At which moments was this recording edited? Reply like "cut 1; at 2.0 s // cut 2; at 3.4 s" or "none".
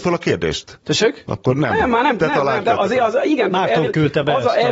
cut 1; at 2.6 s